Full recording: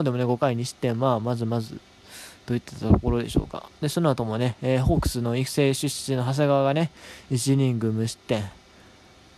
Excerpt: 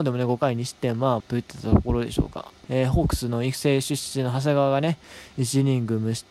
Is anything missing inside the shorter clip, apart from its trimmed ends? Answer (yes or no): yes